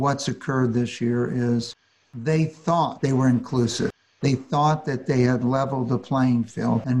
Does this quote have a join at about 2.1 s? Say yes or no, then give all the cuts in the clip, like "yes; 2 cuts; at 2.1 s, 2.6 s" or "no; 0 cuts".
no; 1 cut; at 4.2 s